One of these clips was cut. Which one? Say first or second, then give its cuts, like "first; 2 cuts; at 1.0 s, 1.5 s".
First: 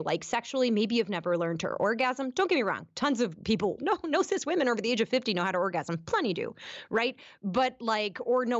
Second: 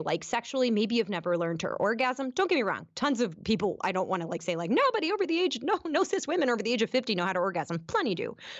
first; 1 cut; at 3.8 s